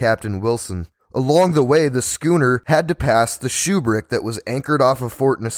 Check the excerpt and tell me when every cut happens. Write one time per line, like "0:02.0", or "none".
0:01.0